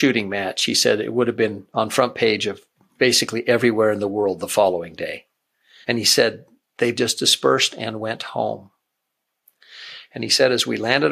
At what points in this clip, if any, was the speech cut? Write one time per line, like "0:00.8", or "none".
0:05.8
0:06.9